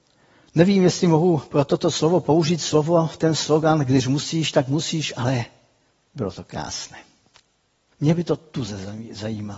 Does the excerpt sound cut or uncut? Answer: cut